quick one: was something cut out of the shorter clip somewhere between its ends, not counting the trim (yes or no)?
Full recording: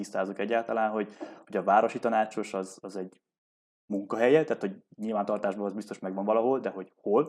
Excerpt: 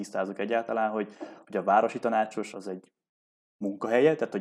yes